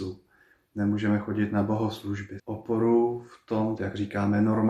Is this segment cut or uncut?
cut